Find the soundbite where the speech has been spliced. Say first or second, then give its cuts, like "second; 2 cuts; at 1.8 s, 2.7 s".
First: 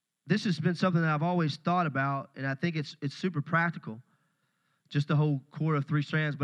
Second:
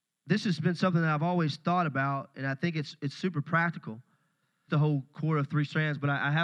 second; 1 cut; at 4.7 s